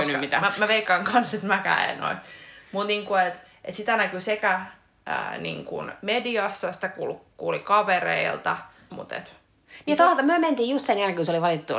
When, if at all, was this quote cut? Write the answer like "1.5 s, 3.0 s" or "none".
8.9 s

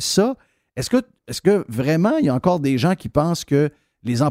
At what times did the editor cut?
none

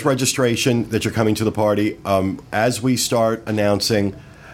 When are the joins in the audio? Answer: none

